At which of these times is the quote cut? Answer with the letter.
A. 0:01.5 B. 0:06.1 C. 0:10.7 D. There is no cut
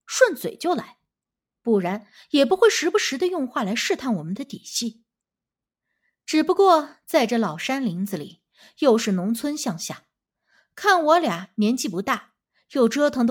A